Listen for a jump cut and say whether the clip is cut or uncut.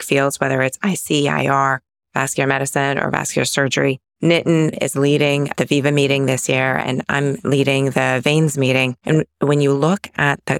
cut